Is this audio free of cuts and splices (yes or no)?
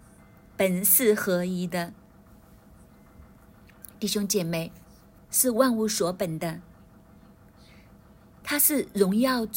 no